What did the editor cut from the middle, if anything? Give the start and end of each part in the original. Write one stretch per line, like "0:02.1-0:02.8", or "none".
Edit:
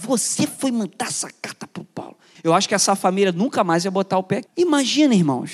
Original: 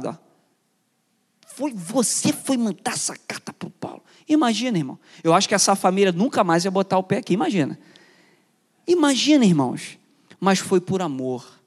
0:04.2-0:05.2
0:07.3-0:08.8